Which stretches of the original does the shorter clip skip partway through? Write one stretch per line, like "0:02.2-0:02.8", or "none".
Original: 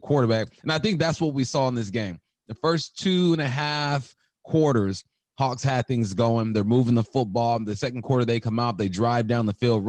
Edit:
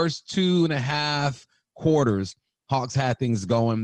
none